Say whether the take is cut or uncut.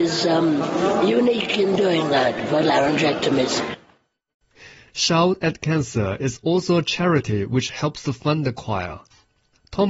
uncut